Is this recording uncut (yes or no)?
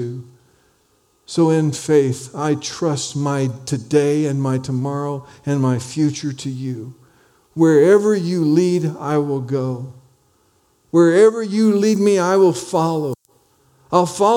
yes